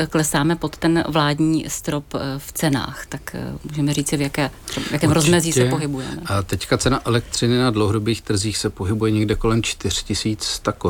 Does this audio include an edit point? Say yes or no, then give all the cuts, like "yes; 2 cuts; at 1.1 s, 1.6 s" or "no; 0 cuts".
no; 0 cuts